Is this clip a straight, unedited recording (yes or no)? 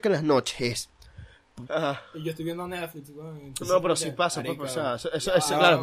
no